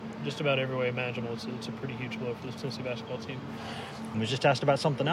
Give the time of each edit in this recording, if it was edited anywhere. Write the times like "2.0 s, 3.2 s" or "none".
4.1 s

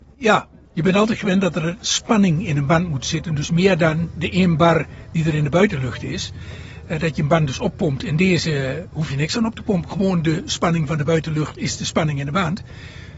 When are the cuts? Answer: none

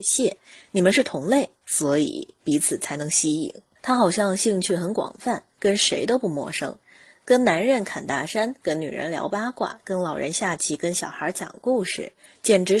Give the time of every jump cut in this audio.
3.8 s

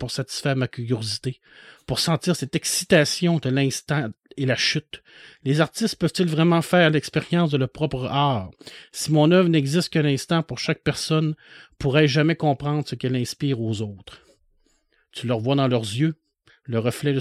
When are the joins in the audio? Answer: none

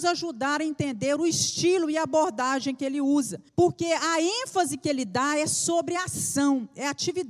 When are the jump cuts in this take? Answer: 3.5 s

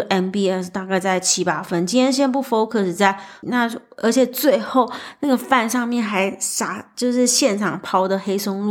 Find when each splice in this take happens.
3.4 s

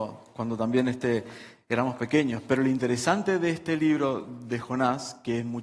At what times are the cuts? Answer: none

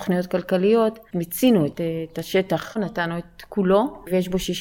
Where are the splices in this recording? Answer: 1.1 s, 2.8 s

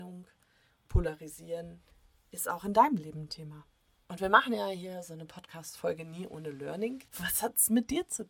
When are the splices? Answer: 4.0 s, 7.1 s

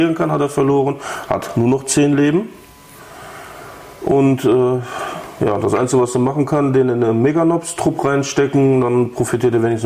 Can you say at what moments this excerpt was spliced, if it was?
none

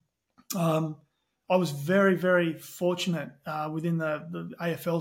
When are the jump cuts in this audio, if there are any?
none

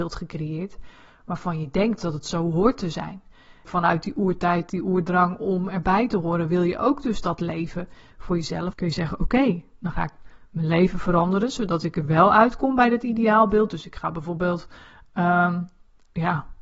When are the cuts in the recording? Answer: 3.7 s, 8.7 s

